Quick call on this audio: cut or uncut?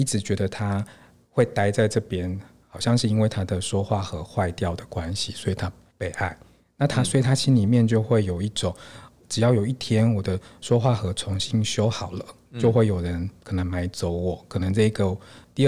uncut